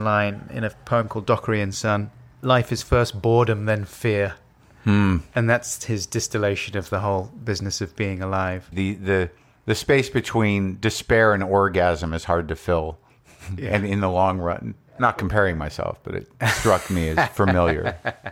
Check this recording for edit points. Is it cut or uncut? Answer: cut